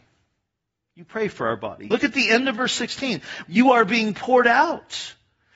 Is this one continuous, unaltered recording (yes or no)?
no